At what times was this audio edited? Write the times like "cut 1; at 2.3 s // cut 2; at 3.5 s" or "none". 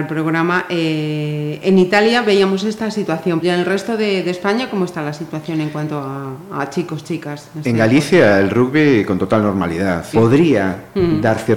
cut 1; at 3.4 s // cut 2; at 10.1 s